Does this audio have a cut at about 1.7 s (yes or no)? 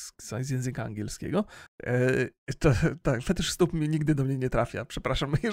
yes